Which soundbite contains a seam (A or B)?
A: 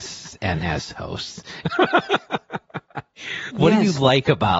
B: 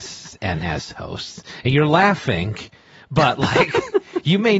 A